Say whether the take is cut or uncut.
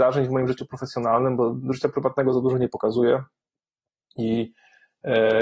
uncut